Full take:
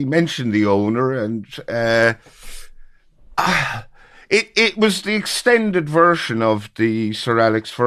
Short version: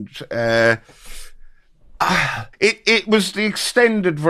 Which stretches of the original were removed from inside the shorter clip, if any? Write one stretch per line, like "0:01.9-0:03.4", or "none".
0:03.9-0:04.2